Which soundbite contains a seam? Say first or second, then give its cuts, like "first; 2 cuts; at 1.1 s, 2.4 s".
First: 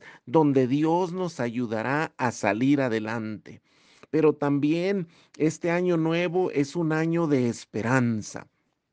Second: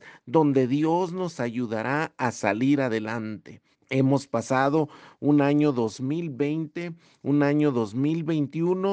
second; 1 cut; at 3.7 s